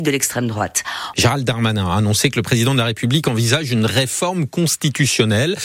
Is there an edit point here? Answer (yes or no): yes